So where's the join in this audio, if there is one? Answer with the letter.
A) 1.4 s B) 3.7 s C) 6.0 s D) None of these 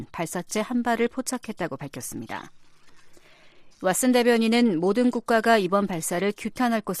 B